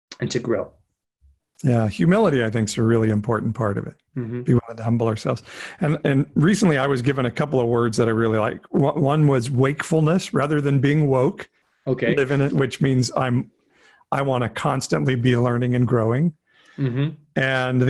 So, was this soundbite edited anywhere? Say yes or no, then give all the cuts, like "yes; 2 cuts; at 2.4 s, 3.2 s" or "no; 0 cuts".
yes; 2 cuts; at 4.1 s, 12.5 s